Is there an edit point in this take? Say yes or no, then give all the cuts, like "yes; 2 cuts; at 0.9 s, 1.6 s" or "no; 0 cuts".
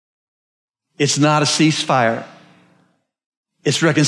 no; 0 cuts